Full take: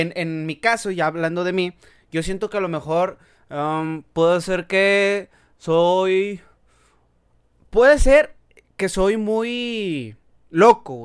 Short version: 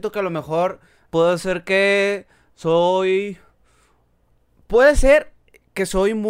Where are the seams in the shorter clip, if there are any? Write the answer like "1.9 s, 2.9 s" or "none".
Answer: 1.1 s